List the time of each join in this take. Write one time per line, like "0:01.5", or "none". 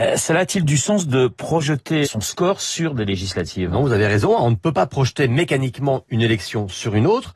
0:02.0